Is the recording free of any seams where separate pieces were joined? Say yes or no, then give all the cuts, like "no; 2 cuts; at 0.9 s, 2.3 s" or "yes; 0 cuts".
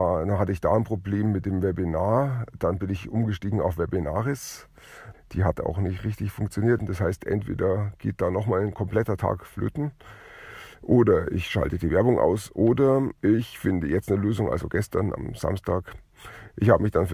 no; 3 cuts; at 5.1 s, 6.8 s, 13.2 s